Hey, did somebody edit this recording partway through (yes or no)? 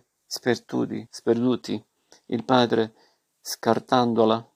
yes